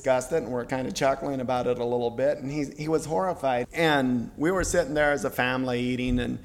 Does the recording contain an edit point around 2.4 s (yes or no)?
no